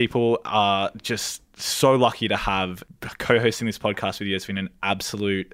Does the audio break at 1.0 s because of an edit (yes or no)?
no